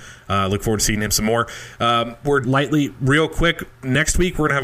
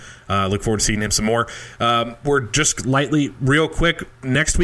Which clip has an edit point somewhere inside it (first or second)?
first